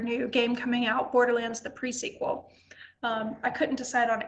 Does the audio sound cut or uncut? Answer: cut